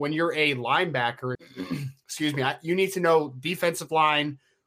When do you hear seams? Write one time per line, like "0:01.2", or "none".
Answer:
0:01.4